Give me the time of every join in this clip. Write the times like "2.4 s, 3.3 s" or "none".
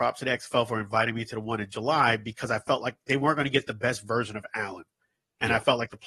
none